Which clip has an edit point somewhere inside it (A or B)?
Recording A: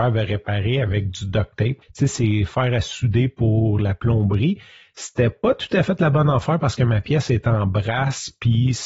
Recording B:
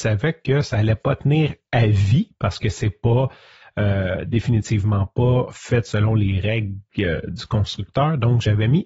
A